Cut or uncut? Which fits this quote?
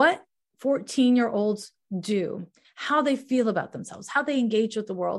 uncut